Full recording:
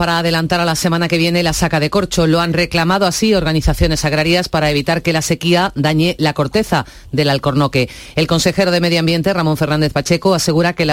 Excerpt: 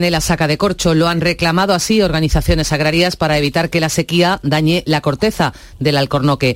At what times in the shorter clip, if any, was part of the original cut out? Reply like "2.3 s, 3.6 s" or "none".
none